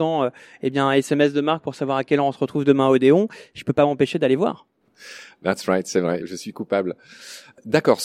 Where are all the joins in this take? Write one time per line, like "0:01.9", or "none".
none